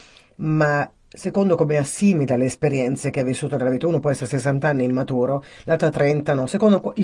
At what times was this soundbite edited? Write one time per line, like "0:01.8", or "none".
0:01.0